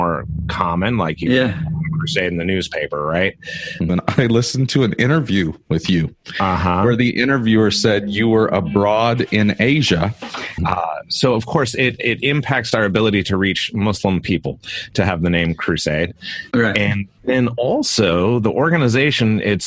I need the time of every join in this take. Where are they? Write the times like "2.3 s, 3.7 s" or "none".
3.9 s, 10.6 s